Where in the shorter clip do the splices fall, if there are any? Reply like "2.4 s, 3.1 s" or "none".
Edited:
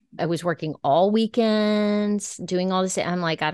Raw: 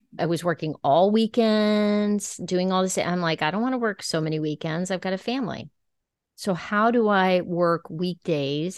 none